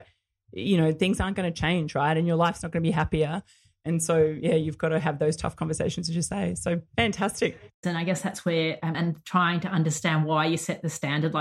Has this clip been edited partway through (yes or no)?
yes